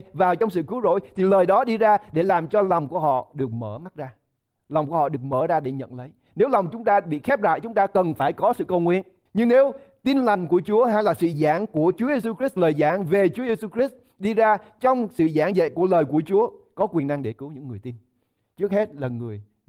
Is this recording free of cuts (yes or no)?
no